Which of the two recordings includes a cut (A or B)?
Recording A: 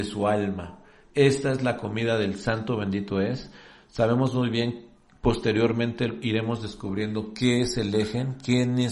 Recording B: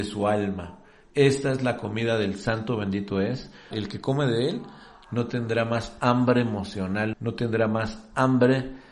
B